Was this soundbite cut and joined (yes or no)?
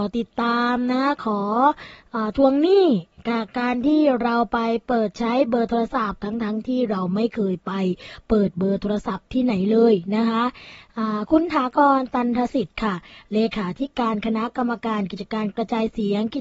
no